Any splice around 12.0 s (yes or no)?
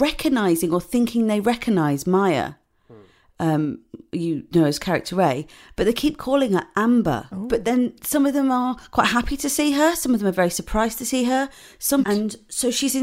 yes